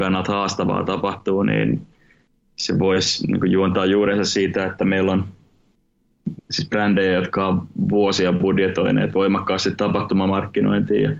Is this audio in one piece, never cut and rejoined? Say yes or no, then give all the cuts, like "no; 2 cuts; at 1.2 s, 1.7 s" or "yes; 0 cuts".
no; 1 cut; at 6.4 s